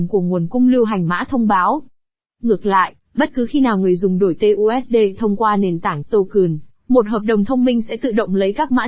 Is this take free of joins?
no; 1 cut; at 6.0 s

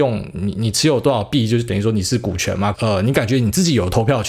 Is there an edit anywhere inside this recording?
yes; 1 cut; at 2.7 s

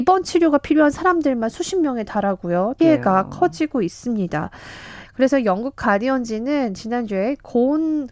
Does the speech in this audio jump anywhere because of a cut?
yes; 2 cuts; at 2.8 s, 5.0 s

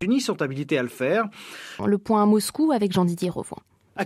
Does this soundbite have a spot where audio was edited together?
yes; 1 cut; at 1.8 s

